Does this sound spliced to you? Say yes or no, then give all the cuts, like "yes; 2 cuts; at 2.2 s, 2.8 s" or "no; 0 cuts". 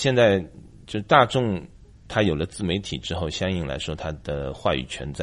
no; 0 cuts